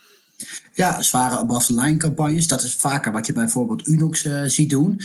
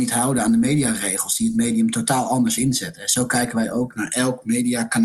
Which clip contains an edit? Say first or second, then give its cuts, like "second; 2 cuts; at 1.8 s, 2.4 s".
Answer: first; 1 cut; at 1.0 s